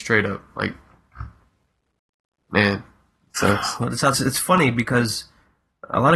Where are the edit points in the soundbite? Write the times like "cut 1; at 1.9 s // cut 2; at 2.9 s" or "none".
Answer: cut 1; at 4.1 s